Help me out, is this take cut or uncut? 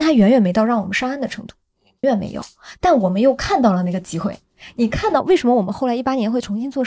cut